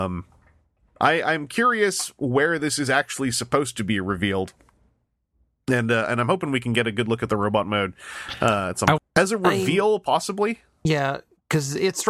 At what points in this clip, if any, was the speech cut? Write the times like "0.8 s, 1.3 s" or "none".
9.0 s